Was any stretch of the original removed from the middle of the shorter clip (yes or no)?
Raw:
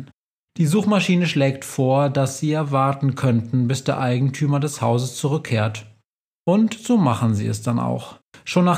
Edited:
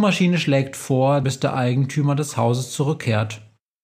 yes